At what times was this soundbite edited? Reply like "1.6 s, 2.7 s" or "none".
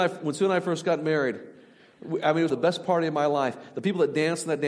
2.5 s